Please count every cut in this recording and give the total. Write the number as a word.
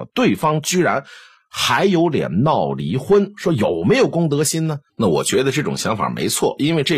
one